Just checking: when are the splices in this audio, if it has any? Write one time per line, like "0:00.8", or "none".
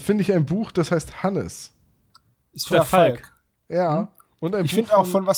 0:02.7